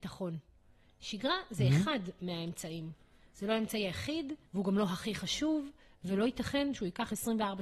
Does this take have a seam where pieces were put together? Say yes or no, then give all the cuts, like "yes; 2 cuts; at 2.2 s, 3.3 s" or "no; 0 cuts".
yes; 1 cut; at 4.4 s